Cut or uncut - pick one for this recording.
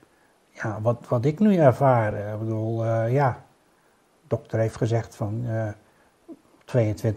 uncut